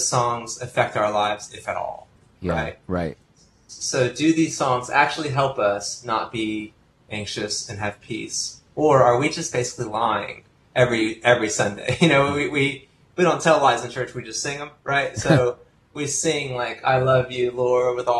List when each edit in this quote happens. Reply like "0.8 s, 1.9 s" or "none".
none